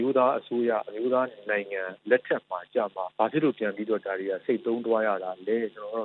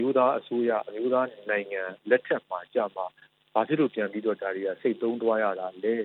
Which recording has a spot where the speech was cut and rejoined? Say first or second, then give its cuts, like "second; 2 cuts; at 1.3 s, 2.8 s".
first; 1 cut; at 3.1 s